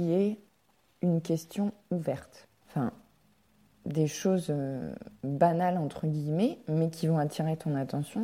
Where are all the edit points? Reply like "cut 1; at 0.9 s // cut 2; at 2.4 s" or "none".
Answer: cut 1; at 2.6 s // cut 2; at 5.1 s